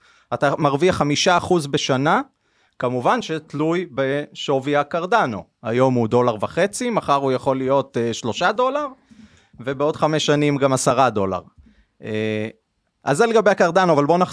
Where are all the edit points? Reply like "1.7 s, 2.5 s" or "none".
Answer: none